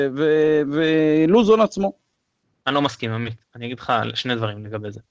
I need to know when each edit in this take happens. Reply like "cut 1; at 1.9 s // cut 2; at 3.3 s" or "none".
none